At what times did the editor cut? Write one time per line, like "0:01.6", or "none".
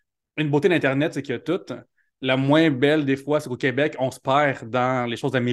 none